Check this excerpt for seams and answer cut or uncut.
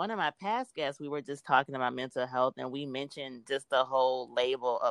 uncut